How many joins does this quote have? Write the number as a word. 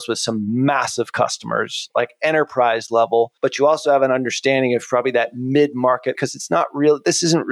two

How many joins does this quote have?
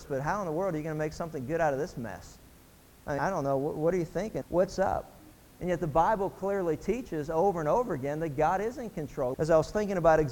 three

